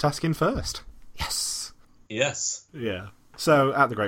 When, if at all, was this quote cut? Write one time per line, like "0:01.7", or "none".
0:02.7